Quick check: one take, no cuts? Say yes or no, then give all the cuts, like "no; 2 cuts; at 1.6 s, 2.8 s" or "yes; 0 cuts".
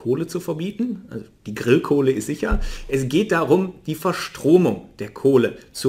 yes; 0 cuts